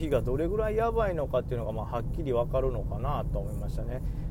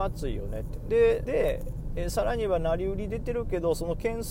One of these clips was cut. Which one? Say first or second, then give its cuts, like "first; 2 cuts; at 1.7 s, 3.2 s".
second; 1 cut; at 1.2 s